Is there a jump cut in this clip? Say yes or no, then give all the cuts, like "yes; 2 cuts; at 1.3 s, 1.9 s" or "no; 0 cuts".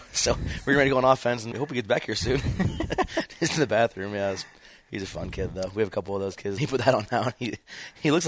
yes; 2 cuts; at 1.5 s, 6.6 s